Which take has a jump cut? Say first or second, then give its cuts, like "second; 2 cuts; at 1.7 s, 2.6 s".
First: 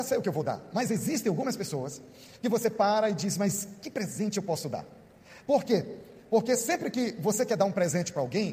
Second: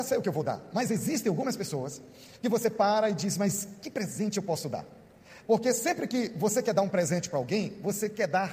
second; 1 cut; at 5.4 s